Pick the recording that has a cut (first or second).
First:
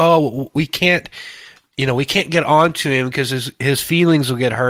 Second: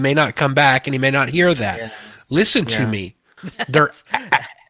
second